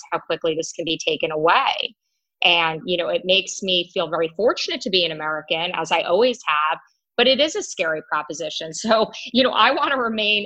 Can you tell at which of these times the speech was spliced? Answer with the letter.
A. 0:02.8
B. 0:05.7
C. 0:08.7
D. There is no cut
A